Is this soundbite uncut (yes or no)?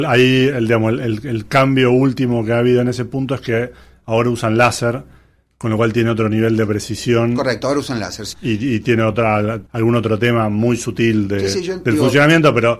no